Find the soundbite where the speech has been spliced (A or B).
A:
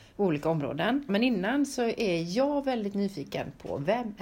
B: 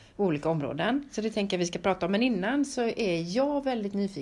A